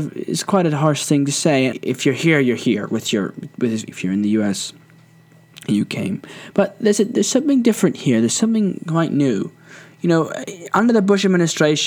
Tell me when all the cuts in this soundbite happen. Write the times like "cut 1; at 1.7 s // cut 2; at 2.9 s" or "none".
cut 1; at 1.7 s // cut 2; at 3.9 s